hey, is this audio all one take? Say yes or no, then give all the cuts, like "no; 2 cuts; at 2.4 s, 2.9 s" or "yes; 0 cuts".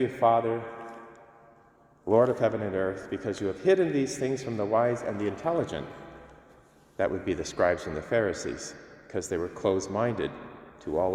yes; 0 cuts